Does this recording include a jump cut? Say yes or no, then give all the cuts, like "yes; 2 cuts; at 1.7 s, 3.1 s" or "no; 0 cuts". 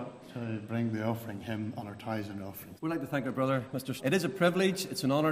yes; 2 cuts; at 2.8 s, 4.0 s